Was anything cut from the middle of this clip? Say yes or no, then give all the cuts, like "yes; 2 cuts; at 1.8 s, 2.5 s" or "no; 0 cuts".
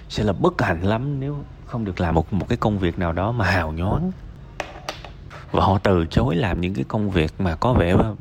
no; 0 cuts